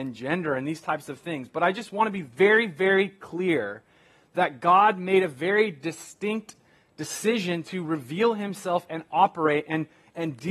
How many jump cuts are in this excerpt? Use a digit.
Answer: 0